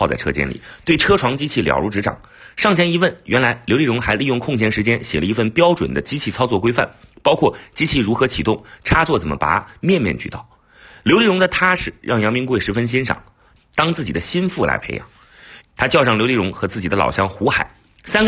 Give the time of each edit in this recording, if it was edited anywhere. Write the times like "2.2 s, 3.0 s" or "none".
13.6 s, 15.6 s